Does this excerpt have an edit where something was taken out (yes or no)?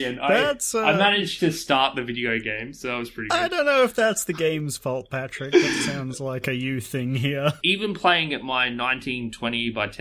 yes